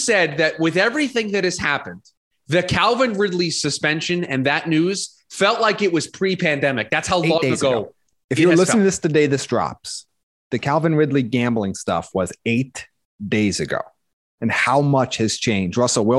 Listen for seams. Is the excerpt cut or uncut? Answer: uncut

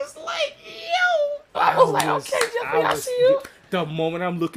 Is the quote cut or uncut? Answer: cut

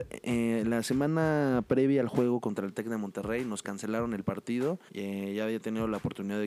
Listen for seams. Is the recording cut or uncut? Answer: cut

